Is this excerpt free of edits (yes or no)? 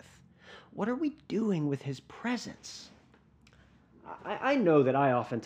yes